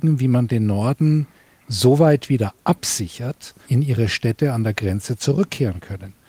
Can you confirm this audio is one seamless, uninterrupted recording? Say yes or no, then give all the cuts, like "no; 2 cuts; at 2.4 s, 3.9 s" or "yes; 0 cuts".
no; 1 cut; at 3.6 s